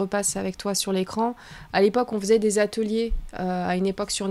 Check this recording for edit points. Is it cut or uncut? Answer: uncut